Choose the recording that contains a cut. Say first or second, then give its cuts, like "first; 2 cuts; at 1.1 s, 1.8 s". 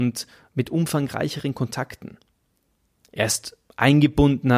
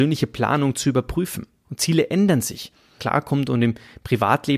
second; 2 cuts; at 1.6 s, 3.0 s